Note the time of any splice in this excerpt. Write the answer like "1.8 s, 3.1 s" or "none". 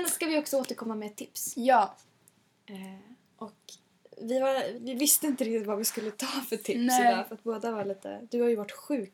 4.7 s